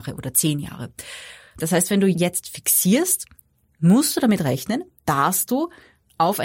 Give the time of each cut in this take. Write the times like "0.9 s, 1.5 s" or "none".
1.6 s